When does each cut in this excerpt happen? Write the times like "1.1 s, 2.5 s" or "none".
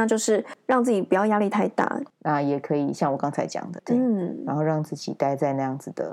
2.1 s, 3.8 s